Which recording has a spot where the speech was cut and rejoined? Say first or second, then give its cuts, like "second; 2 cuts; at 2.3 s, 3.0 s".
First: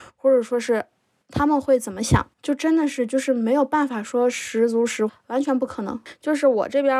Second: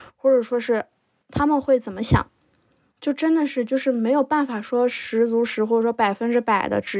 first; 2 cuts; at 2.3 s, 5.1 s